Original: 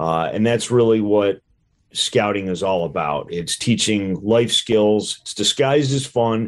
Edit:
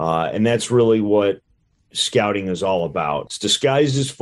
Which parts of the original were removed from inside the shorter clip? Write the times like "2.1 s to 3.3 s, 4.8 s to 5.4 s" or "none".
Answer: 3.3 s to 5.2 s